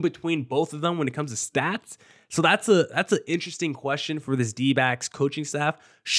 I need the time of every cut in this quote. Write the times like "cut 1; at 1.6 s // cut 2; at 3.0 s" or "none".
none